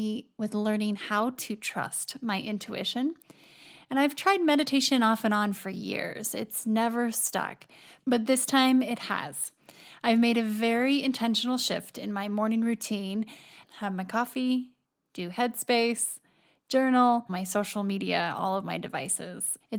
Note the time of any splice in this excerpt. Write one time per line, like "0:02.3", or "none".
0:13.6
0:17.3